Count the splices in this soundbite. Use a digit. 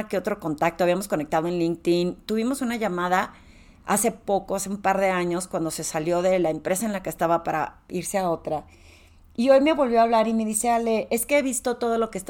0